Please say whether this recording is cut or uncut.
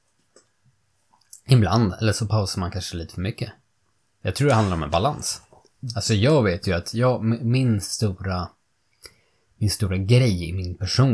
uncut